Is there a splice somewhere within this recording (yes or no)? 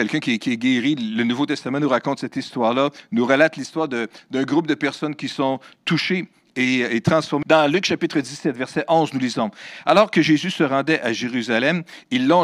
yes